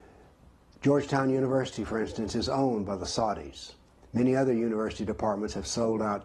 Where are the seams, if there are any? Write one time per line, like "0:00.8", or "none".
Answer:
none